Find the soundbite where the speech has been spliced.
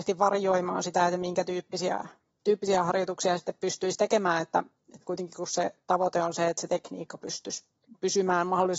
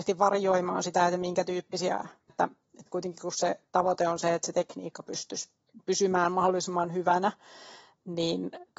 second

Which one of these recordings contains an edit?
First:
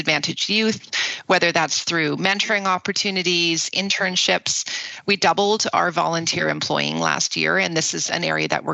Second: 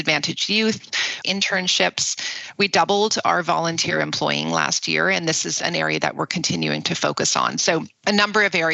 second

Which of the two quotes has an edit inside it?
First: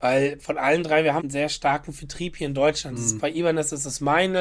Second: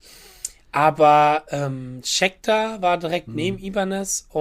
first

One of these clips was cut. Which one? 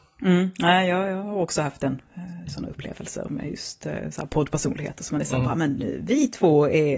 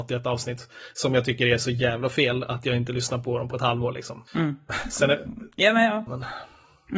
second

